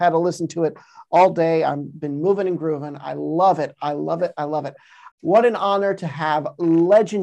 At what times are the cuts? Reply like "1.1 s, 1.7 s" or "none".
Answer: 5.1 s